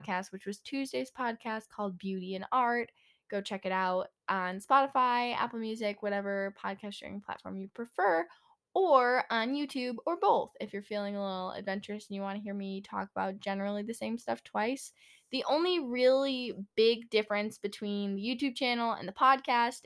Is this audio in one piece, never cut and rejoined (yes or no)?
yes